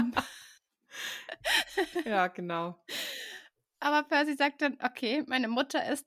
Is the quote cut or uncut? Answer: uncut